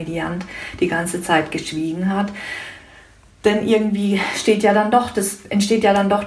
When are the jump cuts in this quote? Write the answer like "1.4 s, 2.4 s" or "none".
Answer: none